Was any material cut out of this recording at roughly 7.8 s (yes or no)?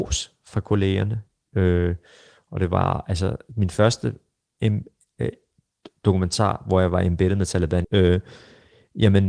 yes